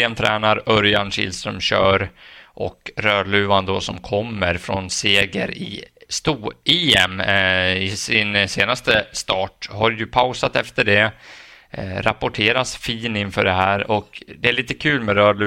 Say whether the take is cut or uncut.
uncut